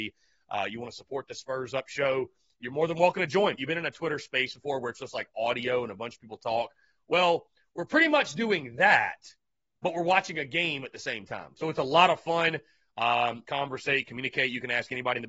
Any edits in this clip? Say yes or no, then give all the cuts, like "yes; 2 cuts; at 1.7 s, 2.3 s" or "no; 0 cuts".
yes; 2 cuts; at 3.6 s, 13.4 s